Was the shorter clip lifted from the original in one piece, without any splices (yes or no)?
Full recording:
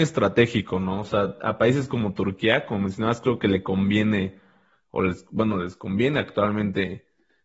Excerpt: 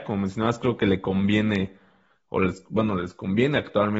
yes